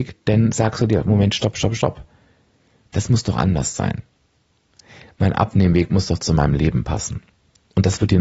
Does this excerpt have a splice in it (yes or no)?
no